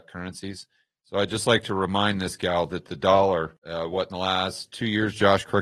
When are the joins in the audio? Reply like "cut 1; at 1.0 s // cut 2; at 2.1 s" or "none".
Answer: cut 1; at 1.0 s